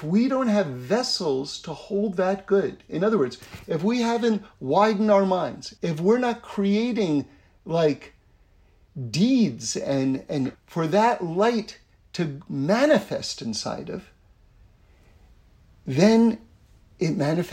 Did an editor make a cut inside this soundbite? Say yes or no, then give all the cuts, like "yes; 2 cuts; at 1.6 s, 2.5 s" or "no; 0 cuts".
yes; 2 cuts; at 5.8 s, 10.5 s